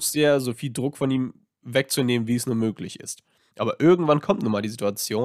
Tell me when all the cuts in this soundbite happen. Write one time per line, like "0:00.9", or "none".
none